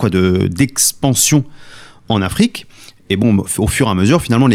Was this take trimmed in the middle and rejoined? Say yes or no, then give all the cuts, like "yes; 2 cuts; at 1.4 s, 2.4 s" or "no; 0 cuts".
no; 0 cuts